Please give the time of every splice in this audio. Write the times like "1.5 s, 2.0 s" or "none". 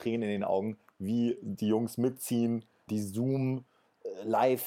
2.9 s